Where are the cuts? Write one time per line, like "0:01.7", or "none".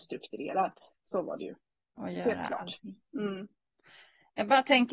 none